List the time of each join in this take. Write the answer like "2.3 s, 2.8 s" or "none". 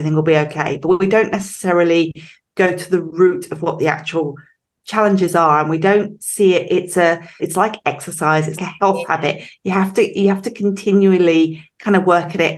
7.4 s, 8.6 s